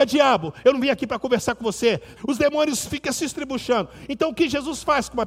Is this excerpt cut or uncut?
cut